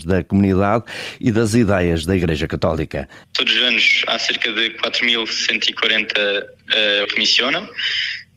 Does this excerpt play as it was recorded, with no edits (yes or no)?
no